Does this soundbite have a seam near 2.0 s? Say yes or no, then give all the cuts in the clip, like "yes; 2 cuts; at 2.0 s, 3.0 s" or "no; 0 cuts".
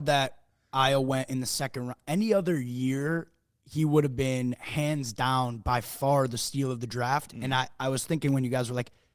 no; 0 cuts